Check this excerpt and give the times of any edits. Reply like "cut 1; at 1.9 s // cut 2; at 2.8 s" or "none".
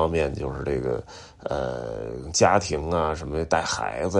none